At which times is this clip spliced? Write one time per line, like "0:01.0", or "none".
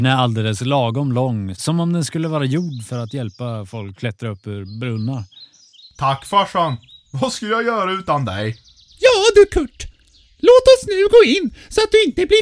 none